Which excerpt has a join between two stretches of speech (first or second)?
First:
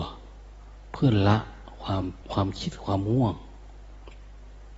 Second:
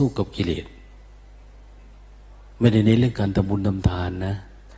first